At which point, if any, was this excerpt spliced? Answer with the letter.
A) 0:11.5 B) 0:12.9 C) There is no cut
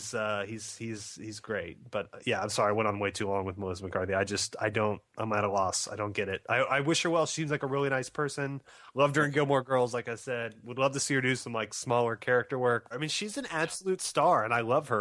B